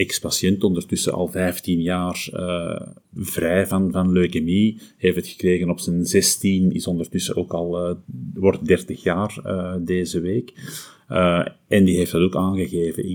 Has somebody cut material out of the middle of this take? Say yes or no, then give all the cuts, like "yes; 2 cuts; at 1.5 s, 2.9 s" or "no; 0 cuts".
no; 0 cuts